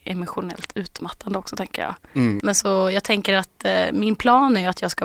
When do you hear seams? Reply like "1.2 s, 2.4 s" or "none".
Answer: 2.4 s